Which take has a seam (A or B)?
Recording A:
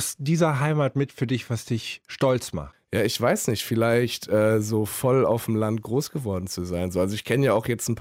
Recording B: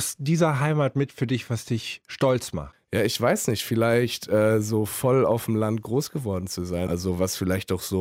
B